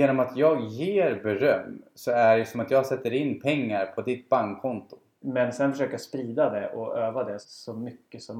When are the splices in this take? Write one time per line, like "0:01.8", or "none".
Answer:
0:05.2
0:07.4